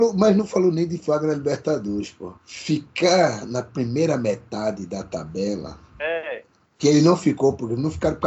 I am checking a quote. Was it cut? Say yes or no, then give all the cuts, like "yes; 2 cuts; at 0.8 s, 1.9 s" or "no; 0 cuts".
yes; 2 cuts; at 2.4 s, 5.9 s